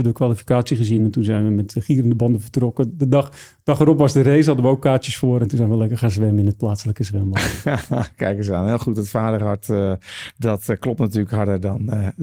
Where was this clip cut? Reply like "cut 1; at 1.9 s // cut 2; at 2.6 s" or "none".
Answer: none